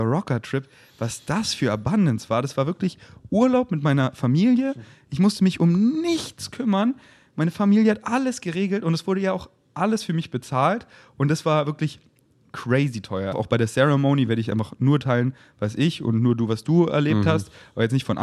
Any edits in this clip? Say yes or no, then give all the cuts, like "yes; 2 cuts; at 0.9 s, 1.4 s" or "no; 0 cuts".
yes; 1 cut; at 13.3 s